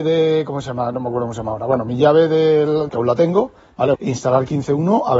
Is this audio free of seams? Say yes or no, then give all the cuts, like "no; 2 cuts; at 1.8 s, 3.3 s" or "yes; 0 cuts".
no; 2 cuts; at 2.9 s, 3.9 s